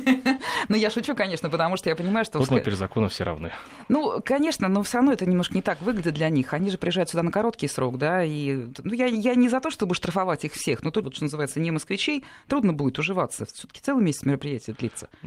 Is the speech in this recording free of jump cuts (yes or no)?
no